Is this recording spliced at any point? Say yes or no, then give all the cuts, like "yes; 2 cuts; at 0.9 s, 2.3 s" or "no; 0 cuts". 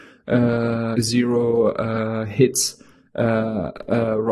yes; 1 cut; at 0.9 s